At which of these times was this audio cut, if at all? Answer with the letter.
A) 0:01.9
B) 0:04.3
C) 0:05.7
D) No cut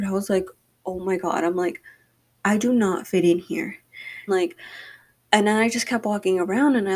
B